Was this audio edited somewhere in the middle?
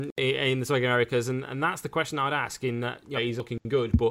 yes; 1 cut; at 3.2 s

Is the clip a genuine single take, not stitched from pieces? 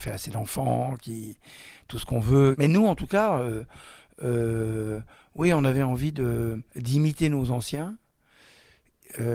no; 1 cut; at 6.7 s

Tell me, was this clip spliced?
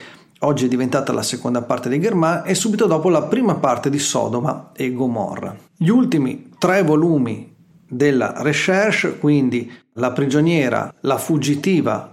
yes; 1 cut; at 5.7 s

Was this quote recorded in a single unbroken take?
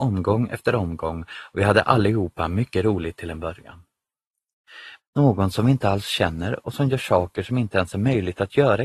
no; 1 cut; at 5.0 s

